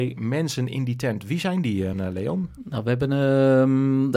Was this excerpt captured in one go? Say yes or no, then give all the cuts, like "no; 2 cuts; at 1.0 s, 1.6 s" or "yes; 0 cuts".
no; 1 cut; at 1.9 s